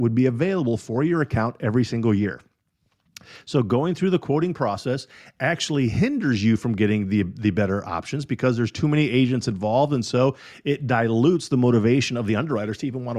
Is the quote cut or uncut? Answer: uncut